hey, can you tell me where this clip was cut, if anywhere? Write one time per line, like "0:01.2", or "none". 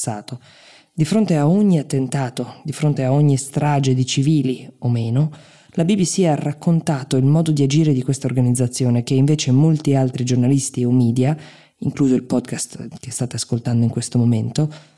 none